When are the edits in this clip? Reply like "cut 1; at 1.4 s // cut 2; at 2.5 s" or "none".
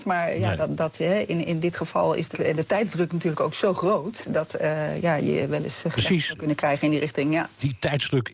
cut 1; at 2.3 s